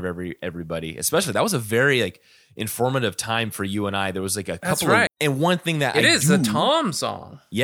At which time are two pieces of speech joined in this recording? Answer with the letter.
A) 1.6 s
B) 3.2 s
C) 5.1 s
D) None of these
C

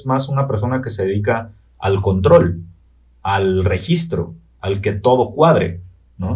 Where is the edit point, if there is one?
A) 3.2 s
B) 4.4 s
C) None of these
C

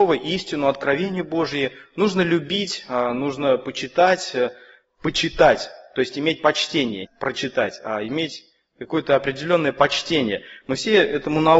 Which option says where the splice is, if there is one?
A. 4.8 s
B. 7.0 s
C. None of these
B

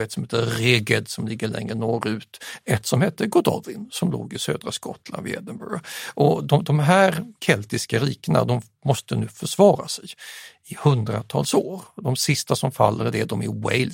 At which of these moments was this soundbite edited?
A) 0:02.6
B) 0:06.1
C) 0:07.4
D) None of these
C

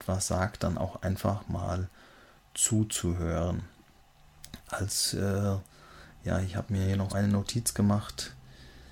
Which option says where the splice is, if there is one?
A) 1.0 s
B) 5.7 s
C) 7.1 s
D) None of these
C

